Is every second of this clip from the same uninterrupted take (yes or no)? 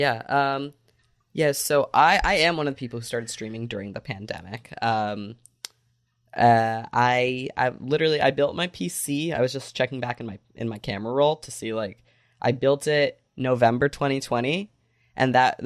yes